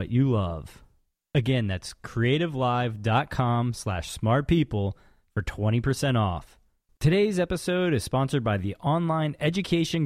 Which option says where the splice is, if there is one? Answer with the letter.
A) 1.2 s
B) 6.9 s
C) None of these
B